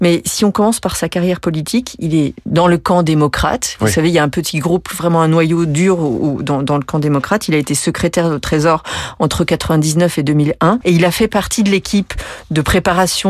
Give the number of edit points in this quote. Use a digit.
1